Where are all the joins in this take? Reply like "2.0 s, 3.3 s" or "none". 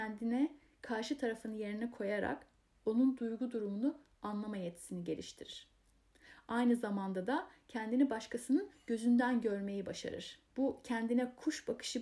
10.5 s

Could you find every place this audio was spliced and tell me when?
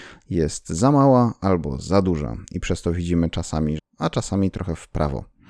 3.8 s

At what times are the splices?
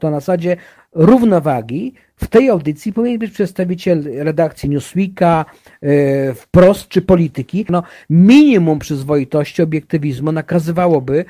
7.7 s

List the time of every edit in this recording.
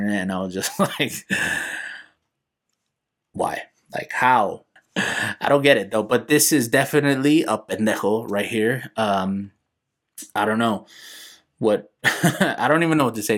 4.8 s

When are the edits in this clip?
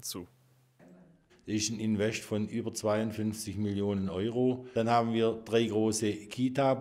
1.3 s

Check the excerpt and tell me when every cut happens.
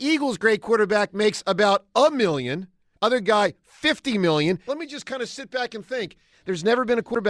2.9 s, 4.7 s, 6.3 s

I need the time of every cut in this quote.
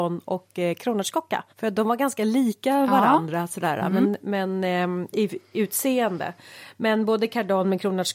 1.5 s

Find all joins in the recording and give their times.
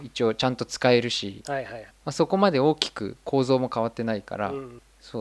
1.9 s

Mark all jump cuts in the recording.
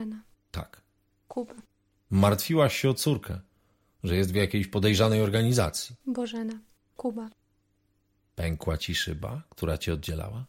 7.0 s

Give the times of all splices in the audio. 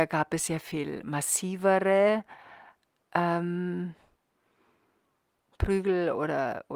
5.5 s

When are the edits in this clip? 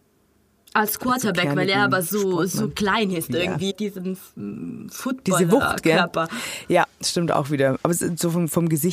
3.7 s

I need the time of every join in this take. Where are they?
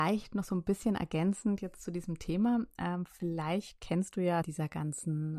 4.4 s

